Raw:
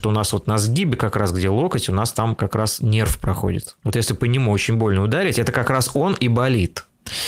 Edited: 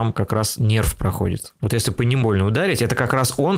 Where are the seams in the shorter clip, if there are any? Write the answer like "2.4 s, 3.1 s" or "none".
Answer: 2.2 s